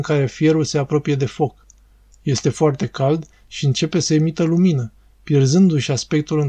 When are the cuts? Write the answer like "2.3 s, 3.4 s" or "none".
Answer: 2.1 s